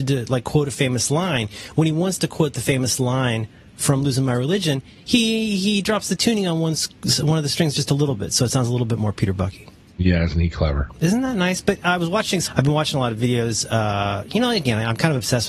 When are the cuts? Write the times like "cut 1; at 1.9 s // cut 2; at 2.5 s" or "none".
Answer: cut 1; at 12.5 s

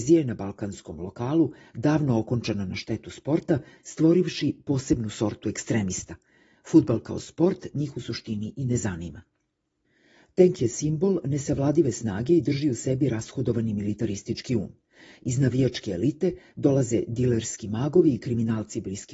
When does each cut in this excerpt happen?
none

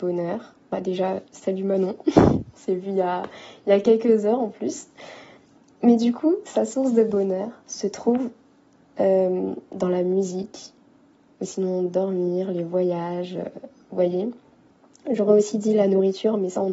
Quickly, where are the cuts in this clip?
none

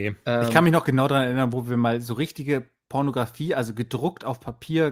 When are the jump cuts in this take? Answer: none

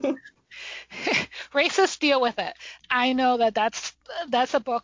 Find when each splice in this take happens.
cut 1; at 2.8 s

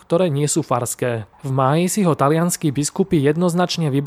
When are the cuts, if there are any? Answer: cut 1; at 1.3 s

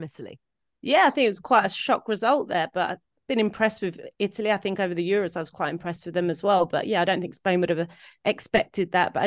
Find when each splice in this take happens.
none

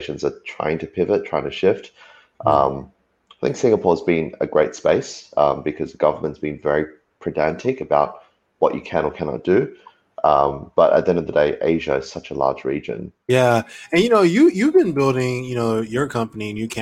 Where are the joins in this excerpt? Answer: cut 1; at 13.2 s

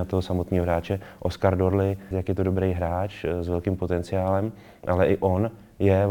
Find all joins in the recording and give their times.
cut 1; at 2.1 s

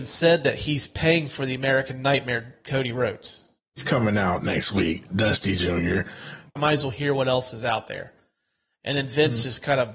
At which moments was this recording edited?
cut 1; at 3.6 s // cut 2; at 6.6 s

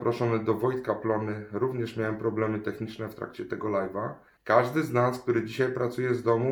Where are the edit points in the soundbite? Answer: cut 1; at 4.4 s

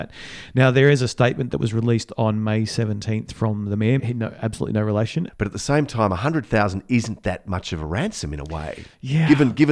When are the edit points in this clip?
cut 1; at 4.0 s // cut 2; at 5.3 s

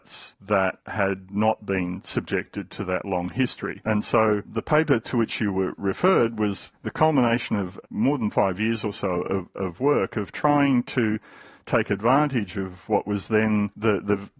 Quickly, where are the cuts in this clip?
none

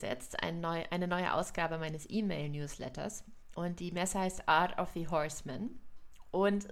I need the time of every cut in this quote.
cut 1; at 3.5 s

